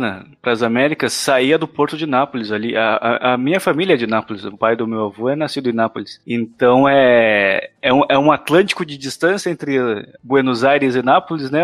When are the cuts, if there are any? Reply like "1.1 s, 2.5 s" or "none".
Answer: none